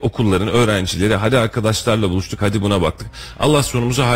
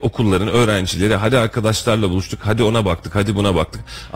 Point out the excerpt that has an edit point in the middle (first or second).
first